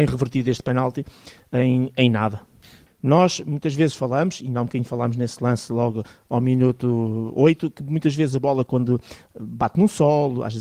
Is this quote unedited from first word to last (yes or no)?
no